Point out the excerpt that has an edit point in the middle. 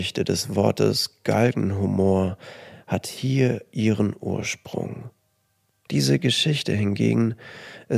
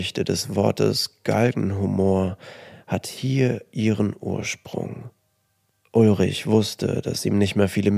first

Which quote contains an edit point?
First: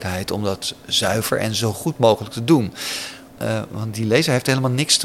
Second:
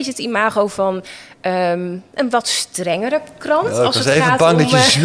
first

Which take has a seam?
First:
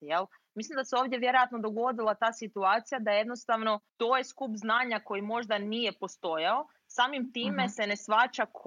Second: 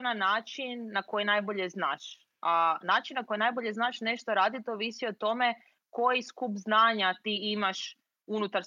first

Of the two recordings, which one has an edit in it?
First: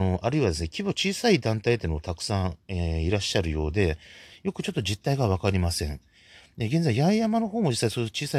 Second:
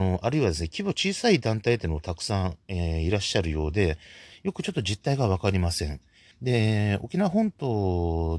second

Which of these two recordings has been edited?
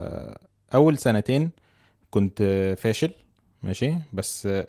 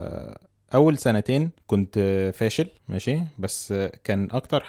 second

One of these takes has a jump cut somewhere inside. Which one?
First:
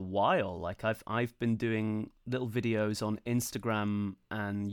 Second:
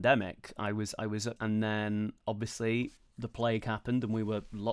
second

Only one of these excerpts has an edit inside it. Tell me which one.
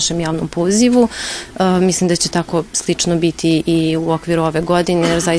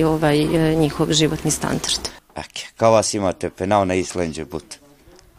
second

